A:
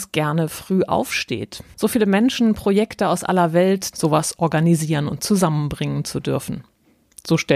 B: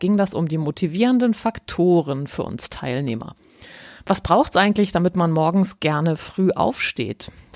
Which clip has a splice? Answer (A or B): A